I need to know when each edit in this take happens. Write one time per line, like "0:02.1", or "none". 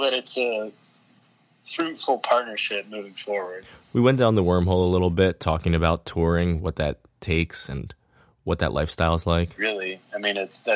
0:09.6